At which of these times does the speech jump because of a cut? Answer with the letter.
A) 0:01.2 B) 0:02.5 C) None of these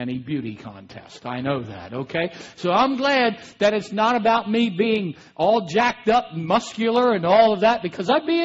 C